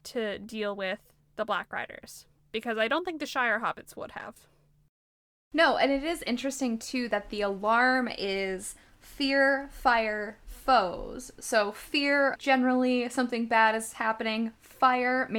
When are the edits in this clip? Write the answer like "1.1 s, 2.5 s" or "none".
12.4 s

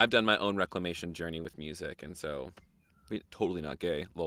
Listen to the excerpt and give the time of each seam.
3.2 s

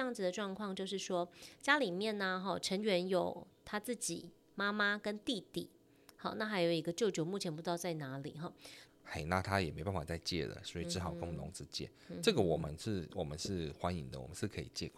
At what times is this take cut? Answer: 8.9 s

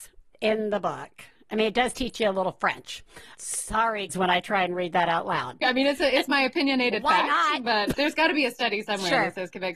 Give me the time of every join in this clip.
4.1 s, 5.6 s, 7.9 s

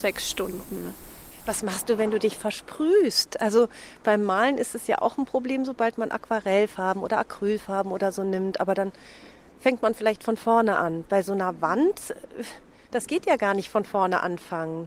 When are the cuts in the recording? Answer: none

